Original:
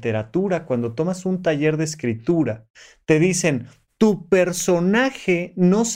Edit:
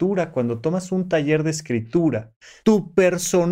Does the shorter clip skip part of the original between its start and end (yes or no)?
yes